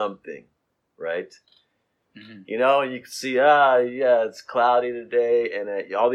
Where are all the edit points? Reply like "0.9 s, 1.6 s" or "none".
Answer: 2.0 s